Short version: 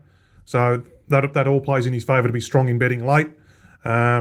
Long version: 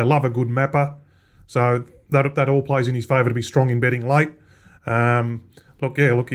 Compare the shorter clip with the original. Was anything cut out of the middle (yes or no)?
no